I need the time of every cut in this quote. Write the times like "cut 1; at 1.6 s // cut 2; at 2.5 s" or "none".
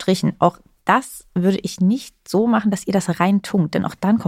none